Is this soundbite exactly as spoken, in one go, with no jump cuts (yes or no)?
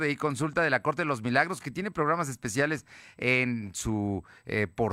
yes